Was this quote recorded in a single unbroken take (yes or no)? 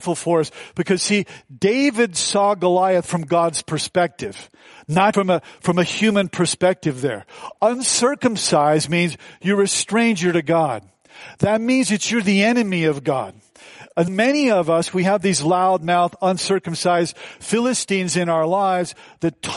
no